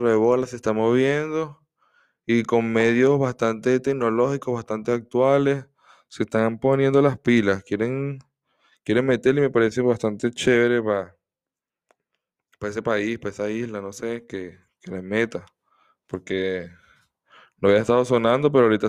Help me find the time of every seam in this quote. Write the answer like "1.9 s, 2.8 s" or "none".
none

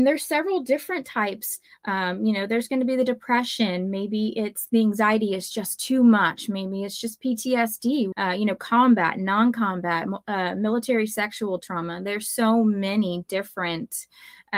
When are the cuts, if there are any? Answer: 8.1 s

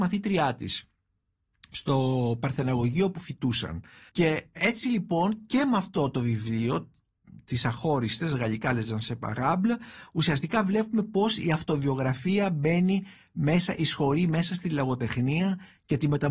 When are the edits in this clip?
4.1 s

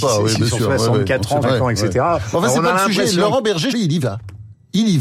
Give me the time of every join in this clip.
1.4 s, 3.7 s

